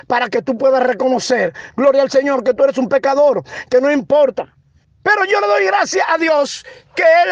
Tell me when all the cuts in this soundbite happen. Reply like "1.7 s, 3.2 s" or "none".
4.8 s